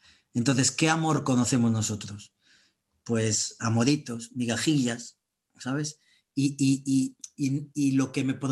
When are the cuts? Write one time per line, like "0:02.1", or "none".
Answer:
none